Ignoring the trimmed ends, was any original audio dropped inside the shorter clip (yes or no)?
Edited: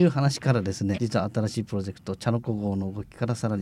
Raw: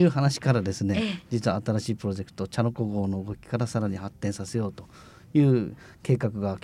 yes